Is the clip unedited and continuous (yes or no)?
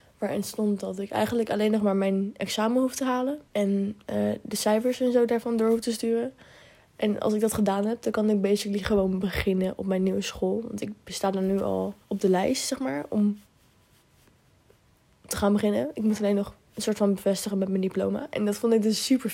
no